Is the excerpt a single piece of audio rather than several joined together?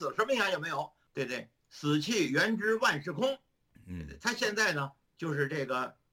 yes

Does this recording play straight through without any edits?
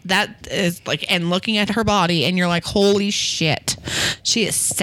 yes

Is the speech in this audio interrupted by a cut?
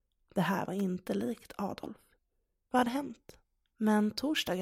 yes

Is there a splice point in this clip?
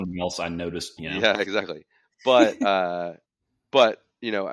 yes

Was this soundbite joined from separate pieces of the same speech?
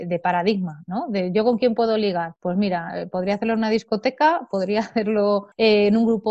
no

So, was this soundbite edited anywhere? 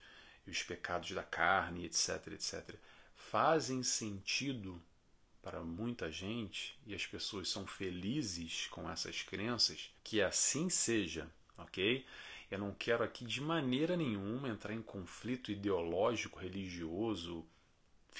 yes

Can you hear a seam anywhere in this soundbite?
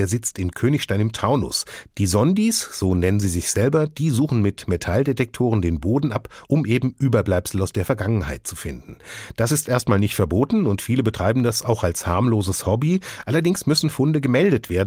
no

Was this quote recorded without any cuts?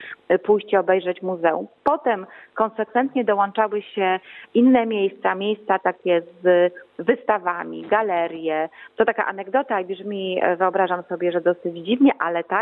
no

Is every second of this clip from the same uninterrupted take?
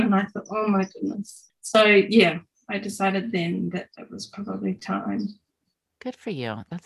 no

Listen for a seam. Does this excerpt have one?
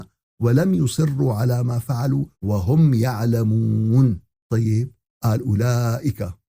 yes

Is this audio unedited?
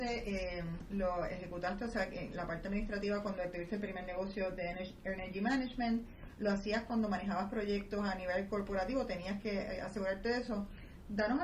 yes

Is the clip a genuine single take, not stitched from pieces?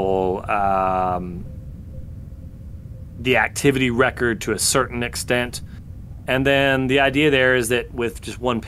no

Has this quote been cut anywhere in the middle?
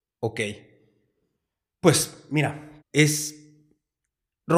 yes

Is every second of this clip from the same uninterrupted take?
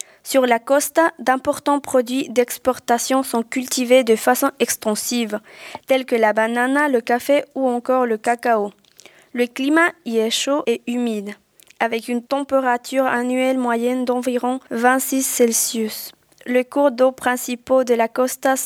yes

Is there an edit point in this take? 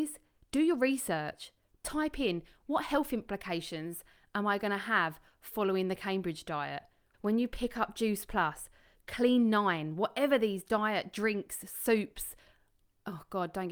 yes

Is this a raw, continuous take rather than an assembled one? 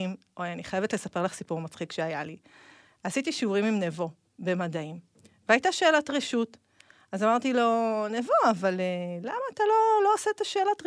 yes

